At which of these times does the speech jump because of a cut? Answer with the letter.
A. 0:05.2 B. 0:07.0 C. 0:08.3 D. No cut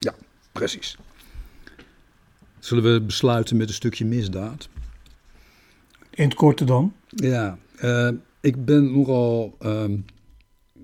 B